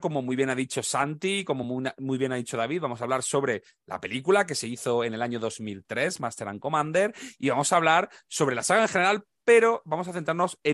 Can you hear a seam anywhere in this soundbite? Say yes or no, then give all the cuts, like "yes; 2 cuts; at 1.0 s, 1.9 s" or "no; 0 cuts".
no; 0 cuts